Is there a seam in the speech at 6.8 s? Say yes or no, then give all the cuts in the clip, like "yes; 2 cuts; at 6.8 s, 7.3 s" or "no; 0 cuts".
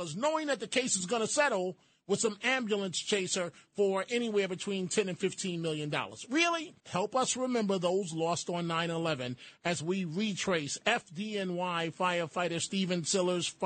yes; 1 cut; at 6.8 s